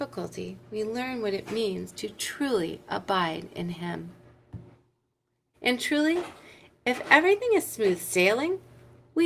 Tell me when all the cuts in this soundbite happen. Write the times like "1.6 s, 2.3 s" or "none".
5.5 s